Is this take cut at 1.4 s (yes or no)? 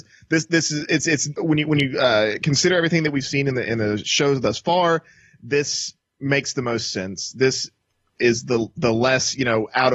yes